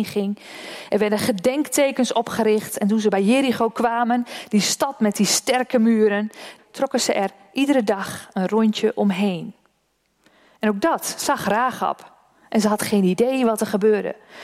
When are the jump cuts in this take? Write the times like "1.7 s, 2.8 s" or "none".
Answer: 6.6 s